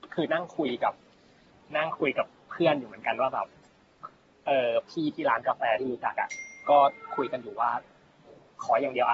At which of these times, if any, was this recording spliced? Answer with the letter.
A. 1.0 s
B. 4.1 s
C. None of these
C